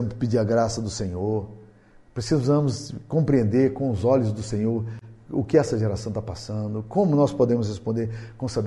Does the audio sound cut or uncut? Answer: uncut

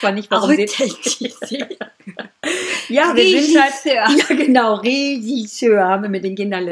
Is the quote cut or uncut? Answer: uncut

